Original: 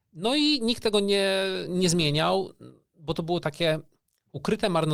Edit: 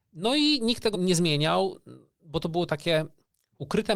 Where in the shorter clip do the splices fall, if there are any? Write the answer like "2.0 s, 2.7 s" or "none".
0.9 s